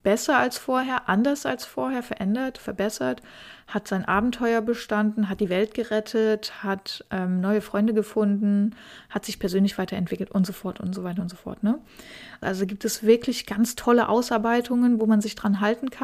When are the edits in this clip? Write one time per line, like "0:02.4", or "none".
0:12.4